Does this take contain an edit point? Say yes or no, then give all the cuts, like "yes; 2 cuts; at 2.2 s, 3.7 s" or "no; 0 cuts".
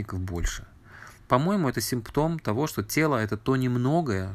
no; 0 cuts